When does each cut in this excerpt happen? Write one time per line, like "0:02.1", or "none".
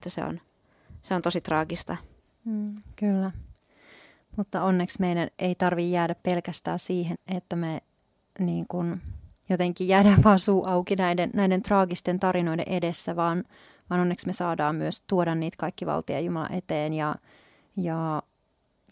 0:07.1
0:09.4